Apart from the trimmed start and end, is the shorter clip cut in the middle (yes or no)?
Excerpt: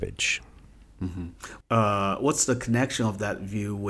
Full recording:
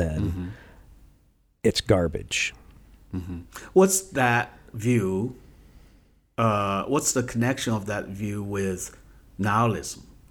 yes